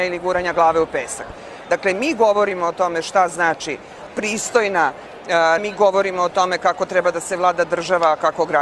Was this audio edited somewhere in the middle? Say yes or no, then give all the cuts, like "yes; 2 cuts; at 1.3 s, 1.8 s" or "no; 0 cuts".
yes; 2 cuts; at 1.6 s, 5.6 s